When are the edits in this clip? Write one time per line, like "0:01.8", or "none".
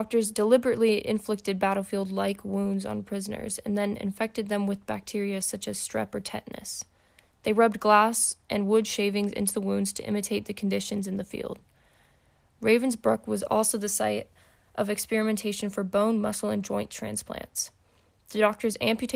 none